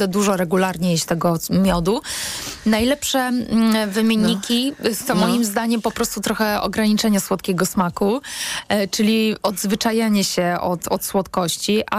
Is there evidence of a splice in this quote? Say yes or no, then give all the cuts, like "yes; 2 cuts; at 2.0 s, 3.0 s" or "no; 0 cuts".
no; 0 cuts